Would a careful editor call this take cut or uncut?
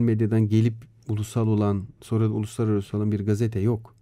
uncut